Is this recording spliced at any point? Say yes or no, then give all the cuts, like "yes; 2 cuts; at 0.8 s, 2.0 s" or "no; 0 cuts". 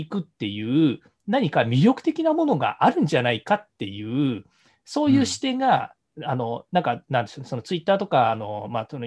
no; 0 cuts